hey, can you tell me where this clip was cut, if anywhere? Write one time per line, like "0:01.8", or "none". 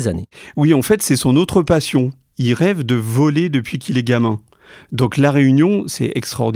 none